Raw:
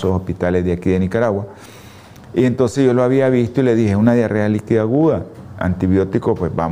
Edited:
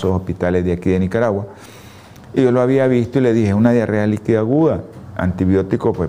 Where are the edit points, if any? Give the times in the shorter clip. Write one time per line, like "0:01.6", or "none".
0:02.4

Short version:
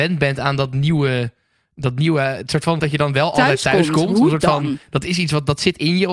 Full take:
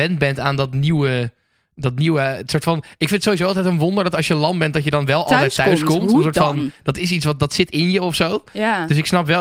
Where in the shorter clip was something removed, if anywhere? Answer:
0:02.8

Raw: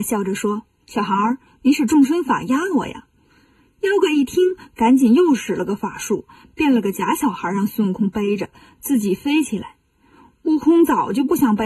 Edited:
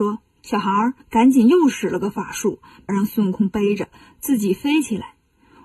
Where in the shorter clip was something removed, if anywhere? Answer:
0:01.0
0:02.9

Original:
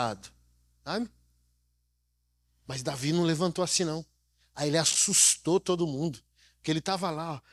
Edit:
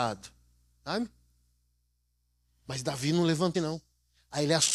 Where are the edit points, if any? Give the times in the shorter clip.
0:03.5

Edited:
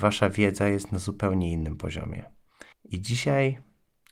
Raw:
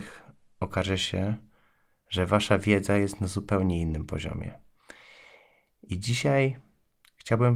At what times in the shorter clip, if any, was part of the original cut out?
0:02.7

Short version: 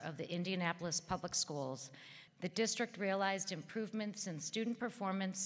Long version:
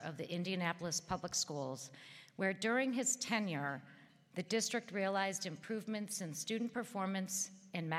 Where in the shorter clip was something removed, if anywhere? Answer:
0:02.3

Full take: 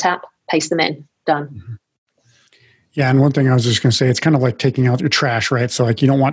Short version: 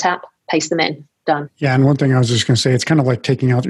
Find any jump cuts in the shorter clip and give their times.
0:01.5

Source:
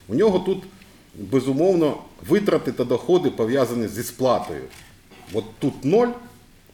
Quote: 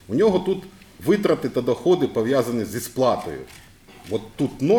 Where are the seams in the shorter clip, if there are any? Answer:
0:01.0

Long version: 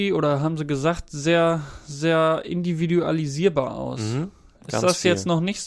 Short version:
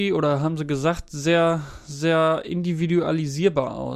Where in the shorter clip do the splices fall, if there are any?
none

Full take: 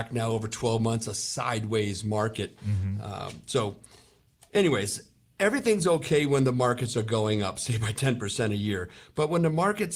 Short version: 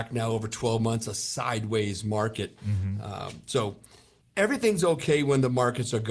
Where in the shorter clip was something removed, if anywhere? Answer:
0:04.2

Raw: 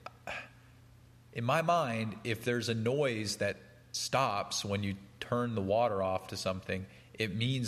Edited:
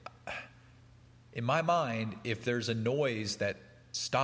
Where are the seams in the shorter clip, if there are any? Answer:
none

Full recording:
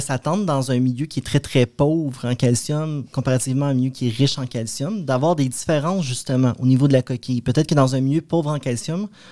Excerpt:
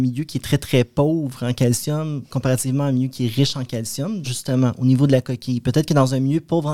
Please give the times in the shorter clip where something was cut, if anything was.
0:04.2

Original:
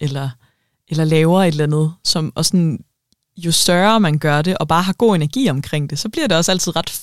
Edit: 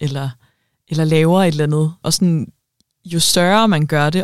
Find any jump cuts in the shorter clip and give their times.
0:02.0

